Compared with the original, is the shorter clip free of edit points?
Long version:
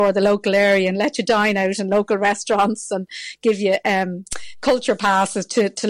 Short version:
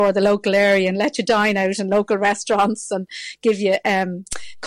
yes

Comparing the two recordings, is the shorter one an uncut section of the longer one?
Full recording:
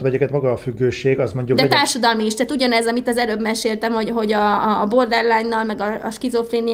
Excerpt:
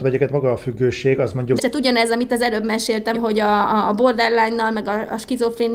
no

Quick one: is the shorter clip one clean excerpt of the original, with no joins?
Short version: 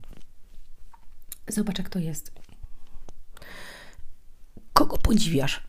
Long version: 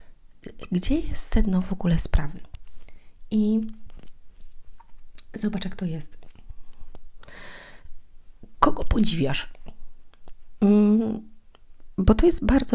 yes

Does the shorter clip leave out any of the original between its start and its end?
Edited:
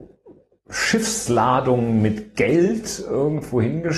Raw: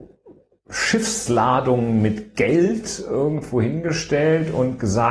no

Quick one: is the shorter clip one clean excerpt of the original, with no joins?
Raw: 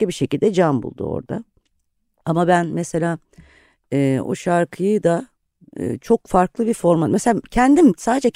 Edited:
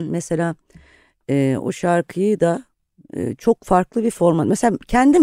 yes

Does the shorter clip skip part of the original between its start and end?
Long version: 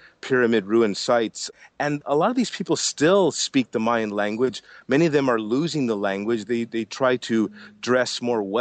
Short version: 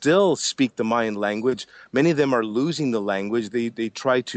no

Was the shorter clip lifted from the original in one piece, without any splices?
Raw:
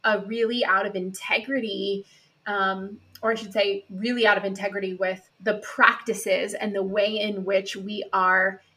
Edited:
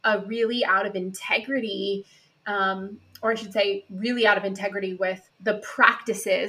yes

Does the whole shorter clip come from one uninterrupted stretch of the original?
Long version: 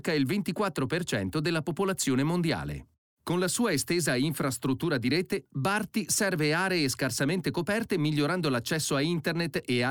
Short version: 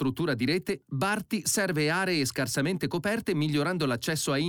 yes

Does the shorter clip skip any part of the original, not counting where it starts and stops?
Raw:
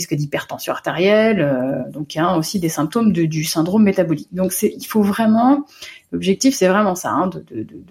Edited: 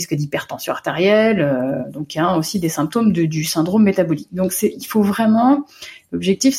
no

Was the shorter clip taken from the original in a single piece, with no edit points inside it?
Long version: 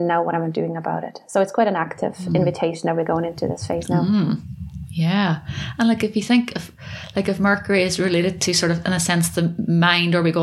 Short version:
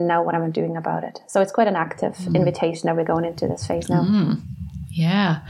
yes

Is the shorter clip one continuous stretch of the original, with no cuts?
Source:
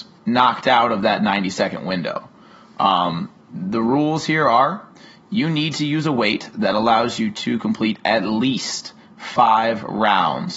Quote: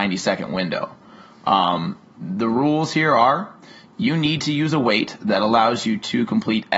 yes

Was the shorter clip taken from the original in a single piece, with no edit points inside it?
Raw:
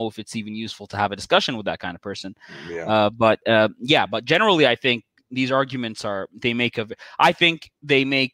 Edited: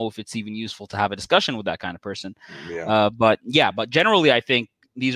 no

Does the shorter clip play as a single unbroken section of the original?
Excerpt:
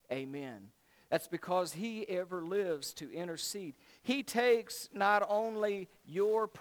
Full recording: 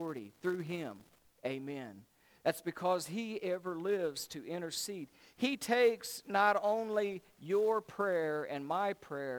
yes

